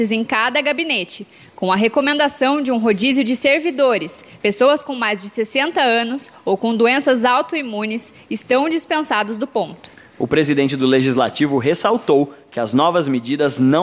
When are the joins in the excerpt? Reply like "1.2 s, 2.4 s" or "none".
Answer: none